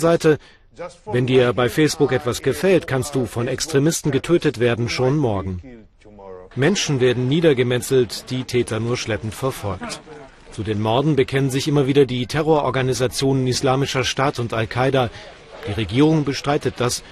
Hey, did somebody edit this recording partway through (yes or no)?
yes